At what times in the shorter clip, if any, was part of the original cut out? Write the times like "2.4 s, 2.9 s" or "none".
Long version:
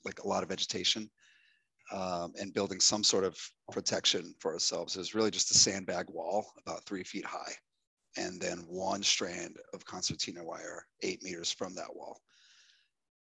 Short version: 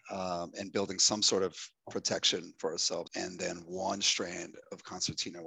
3.1 s